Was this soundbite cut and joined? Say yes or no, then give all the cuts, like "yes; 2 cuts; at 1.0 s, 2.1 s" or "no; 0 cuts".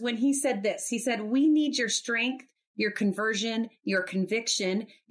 no; 0 cuts